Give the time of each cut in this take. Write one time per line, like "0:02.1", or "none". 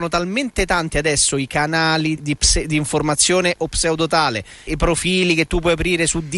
0:02.2
0:04.7